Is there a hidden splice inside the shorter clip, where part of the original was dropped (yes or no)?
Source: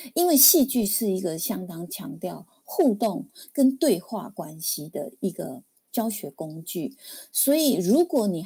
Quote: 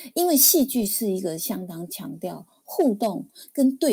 no